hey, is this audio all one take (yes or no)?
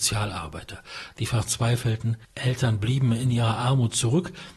no